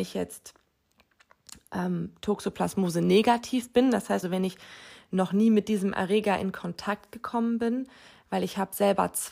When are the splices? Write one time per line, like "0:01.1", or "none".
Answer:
0:04.2